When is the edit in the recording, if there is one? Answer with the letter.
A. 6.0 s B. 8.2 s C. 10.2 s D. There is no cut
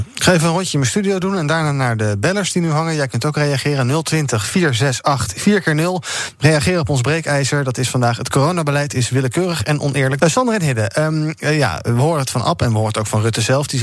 C